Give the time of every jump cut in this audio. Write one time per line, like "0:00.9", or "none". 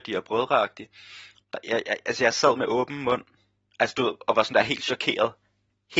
0:01.4